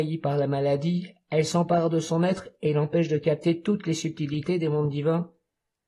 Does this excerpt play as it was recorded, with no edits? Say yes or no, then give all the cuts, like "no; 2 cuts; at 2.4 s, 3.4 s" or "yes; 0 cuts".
yes; 0 cuts